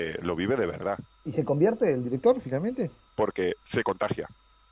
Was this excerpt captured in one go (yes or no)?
no